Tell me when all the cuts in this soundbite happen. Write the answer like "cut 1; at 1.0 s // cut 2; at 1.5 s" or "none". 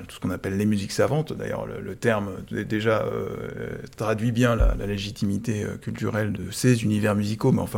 cut 1; at 6.3 s